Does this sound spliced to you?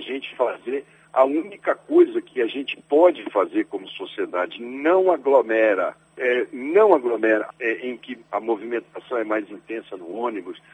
yes; 2 cuts; at 6.1 s, 7.5 s

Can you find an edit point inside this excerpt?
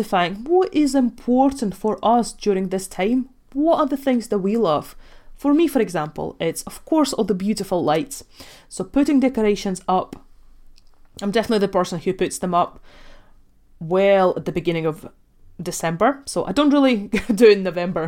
no; 0 cuts

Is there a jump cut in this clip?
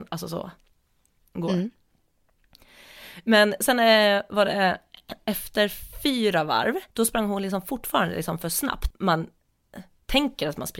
yes; 2 cuts; at 6.9 s, 8.9 s

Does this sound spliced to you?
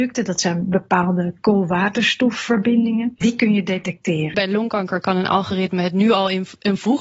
yes; 2 cuts; at 3.2 s, 4.3 s

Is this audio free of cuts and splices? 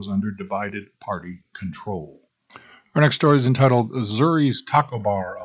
yes; 0 cuts

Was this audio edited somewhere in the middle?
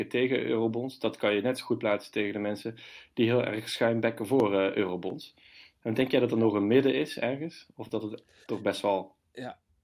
no; 0 cuts

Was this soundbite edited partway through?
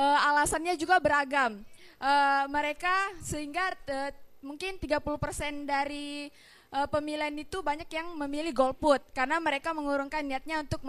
no; 0 cuts

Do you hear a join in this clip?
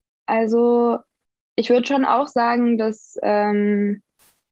no; 0 cuts

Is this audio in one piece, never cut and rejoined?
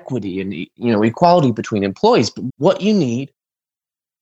no; 1 cut; at 2.5 s

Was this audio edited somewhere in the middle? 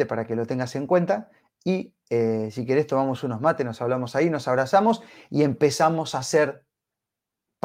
no; 0 cuts

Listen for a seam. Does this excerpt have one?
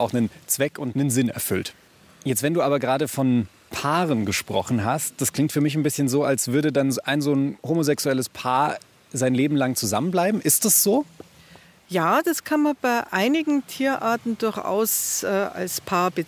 no; 0 cuts

